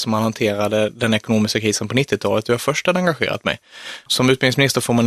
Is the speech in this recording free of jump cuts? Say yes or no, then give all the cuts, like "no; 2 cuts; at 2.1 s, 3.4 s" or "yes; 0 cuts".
no; 1 cut; at 4.1 s